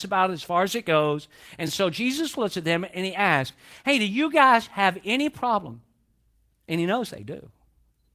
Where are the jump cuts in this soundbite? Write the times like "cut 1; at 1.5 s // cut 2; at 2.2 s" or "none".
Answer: none

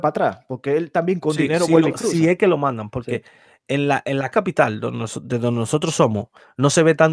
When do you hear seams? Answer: cut 1; at 4.3 s

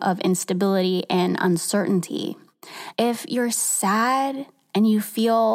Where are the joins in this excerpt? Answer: cut 1; at 2.9 s

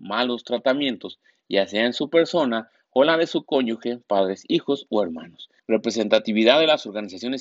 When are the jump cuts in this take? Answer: cut 1; at 5.6 s

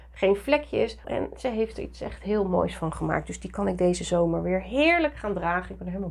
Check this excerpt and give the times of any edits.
cut 1; at 1.0 s

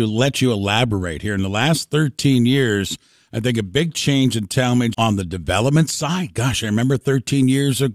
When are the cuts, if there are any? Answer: cut 1; at 4.9 s

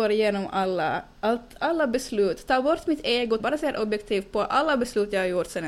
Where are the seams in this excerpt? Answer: cut 1; at 1.6 s // cut 2; at 3.4 s

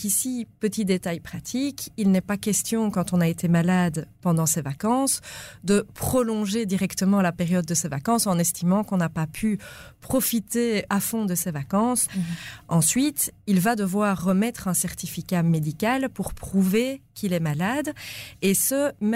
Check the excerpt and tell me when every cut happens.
cut 1; at 10.9 s // cut 2; at 12.1 s

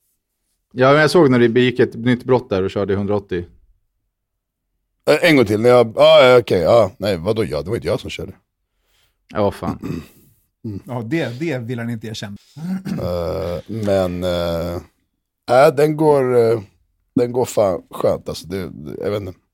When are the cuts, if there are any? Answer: cut 1; at 12.4 s

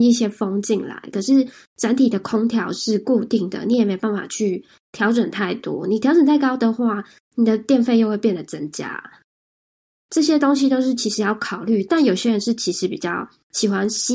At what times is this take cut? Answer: none

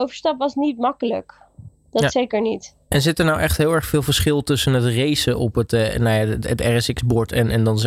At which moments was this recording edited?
none

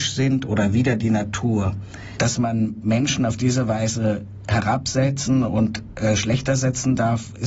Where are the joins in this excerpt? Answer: cut 1; at 2.2 s

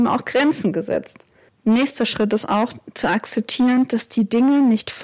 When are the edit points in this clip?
cut 1; at 1.5 s

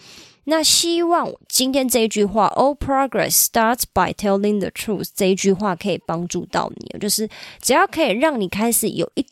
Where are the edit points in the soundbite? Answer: none

